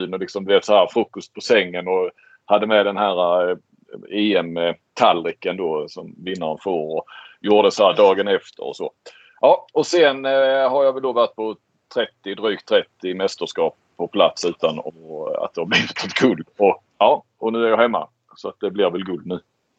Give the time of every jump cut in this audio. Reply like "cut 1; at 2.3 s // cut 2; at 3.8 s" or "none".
cut 1; at 16.9 s